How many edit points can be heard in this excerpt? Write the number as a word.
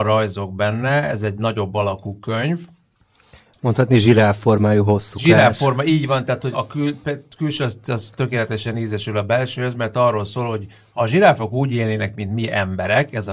one